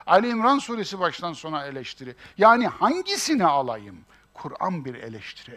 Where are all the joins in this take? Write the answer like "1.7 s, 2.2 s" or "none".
none